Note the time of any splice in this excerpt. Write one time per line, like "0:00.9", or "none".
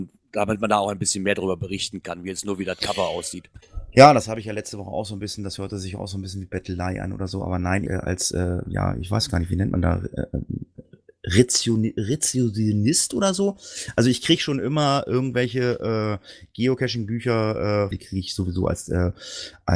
0:07.9
0:17.9